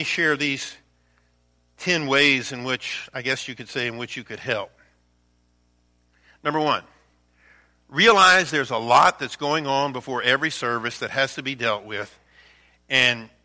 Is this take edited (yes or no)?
no